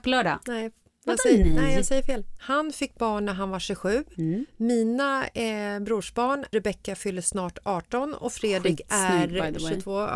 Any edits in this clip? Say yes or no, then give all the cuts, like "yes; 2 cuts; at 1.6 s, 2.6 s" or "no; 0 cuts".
yes; 1 cut; at 2.4 s